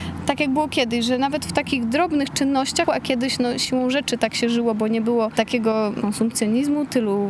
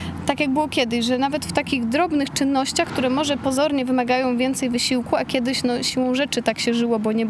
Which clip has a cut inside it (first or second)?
first